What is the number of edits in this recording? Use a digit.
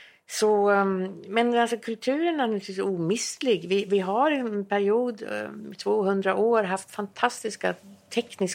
0